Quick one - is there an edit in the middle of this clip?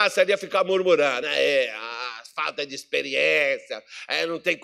no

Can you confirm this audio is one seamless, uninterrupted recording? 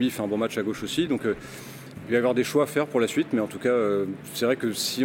yes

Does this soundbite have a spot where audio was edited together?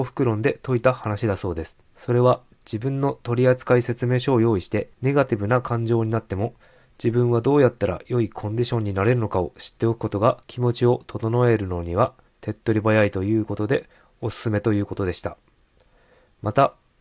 yes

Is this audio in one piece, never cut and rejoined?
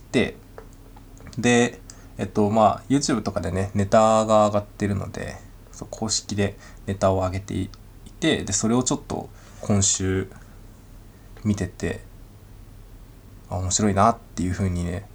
yes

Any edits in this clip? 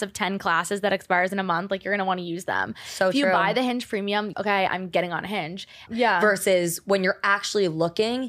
yes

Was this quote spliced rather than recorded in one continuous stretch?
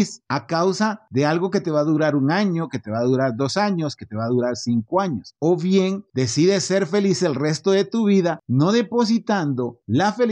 no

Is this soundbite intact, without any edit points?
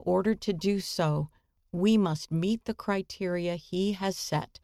yes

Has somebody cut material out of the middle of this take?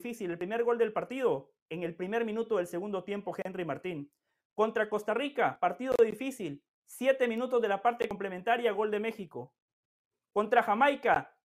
yes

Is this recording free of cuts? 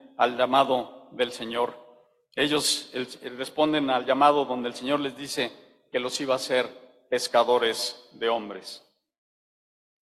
yes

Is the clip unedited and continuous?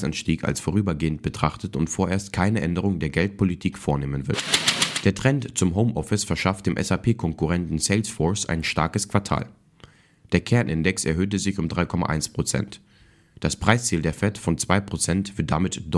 no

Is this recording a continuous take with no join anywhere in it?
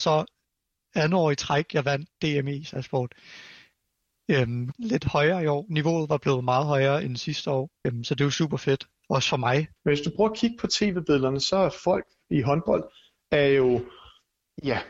no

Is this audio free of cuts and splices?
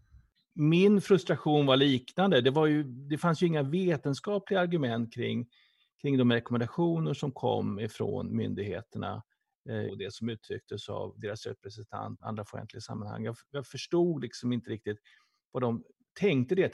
no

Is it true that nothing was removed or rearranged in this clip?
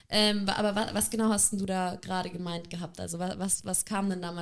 yes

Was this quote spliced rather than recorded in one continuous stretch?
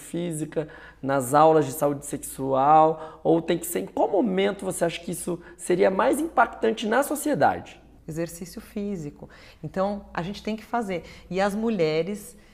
yes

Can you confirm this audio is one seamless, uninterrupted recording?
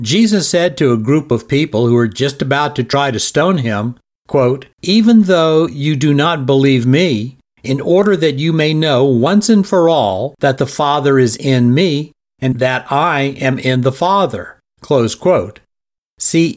no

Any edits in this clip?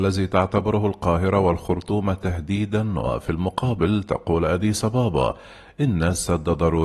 no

